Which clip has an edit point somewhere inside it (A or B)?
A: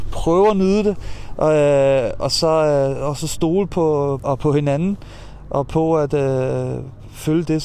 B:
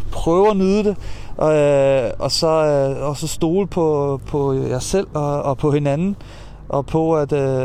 A